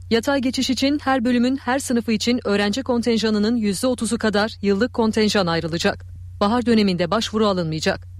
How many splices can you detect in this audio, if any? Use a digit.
1